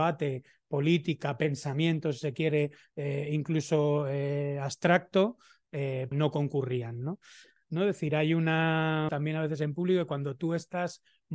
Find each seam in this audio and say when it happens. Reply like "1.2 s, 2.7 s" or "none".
6.1 s, 7.6 s, 9.1 s